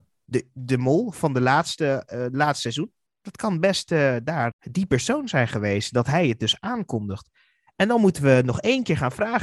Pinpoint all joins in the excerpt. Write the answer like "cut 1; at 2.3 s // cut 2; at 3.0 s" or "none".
cut 1; at 4.5 s